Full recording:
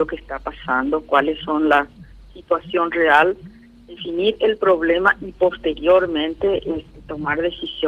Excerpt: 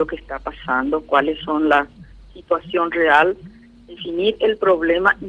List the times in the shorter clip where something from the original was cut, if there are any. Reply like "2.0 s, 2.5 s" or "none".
none